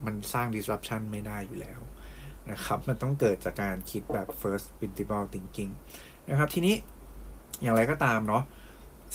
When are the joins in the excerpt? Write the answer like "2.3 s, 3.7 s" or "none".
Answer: 3.5 s